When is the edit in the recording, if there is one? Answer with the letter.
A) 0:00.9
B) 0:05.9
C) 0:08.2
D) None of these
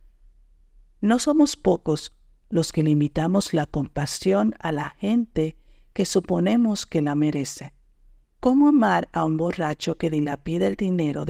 C